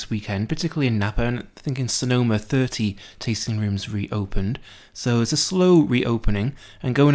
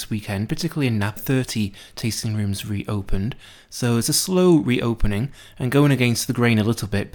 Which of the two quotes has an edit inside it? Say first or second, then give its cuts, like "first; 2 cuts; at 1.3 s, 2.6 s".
second; 1 cut; at 1.2 s